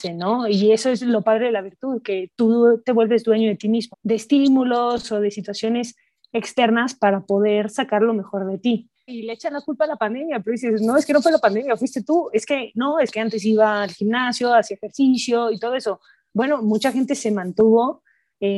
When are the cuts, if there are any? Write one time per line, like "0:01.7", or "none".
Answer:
0:03.9
0:09.1